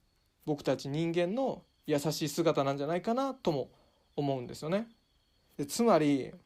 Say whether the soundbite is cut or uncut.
cut